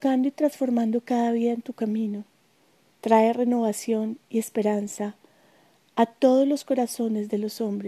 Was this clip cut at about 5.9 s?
no; 1 cut; at 2.9 s

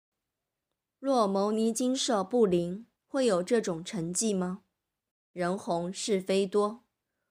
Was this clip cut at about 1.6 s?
no; 2 cuts; at 3.0 s, 5.1 s

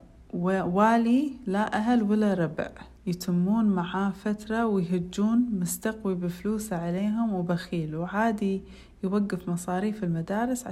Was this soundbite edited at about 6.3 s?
no; 1 cut; at 3.0 s

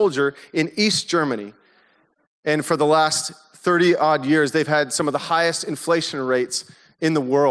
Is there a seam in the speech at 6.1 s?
no; 1 cut; at 2.2 s

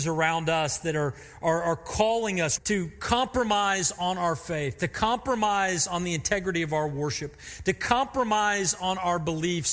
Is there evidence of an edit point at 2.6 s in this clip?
yes; 1 cut; at 2.6 s

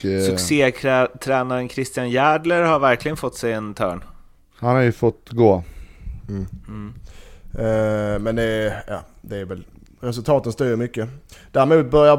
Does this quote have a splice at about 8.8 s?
no; 0 cuts

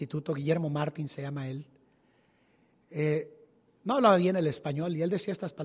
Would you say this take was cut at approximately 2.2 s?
no; 0 cuts

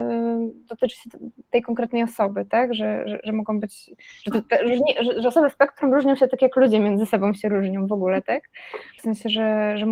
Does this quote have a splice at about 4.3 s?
no; 1 cut; at 9.0 s

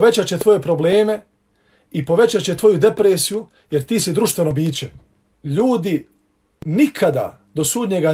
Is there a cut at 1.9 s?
no; 1 cut; at 5.3 s

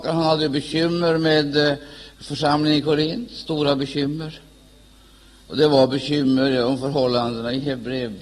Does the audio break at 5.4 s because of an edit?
no; 0 cuts

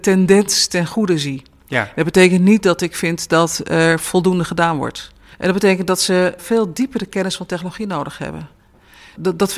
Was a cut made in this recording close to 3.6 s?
no; 2 cuts; at 5.3 s, 6.4 s

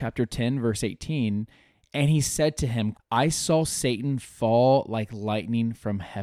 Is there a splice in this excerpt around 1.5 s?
no; 1 cut; at 2.9 s

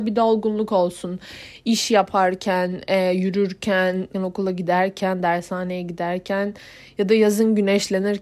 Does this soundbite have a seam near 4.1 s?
yes; 1 cut; at 4.1 s

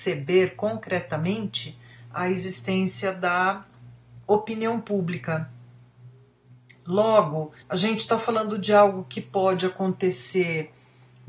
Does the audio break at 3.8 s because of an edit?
no; 1 cut; at 7.6 s

